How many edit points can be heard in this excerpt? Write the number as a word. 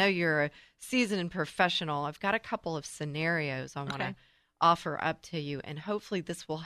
zero